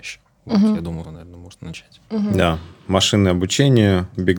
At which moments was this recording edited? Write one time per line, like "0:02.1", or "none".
0:01.0